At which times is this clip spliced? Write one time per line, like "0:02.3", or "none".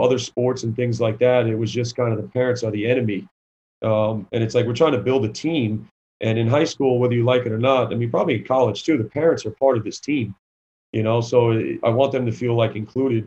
none